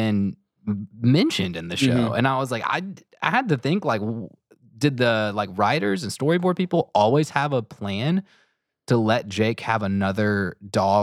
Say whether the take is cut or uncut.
uncut